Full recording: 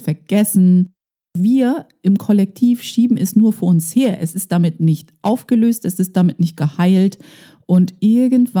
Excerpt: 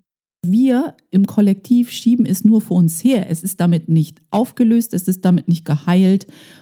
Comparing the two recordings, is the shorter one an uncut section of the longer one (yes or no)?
yes